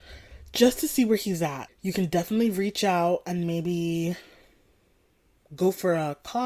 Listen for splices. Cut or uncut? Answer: cut